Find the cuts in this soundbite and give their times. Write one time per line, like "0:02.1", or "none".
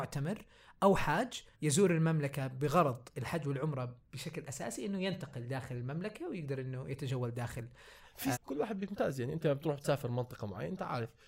0:01.5
0:08.3